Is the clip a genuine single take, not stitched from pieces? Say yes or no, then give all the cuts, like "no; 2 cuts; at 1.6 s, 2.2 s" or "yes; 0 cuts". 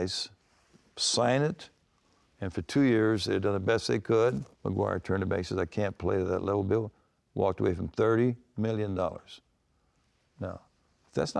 no; 1 cut; at 4.5 s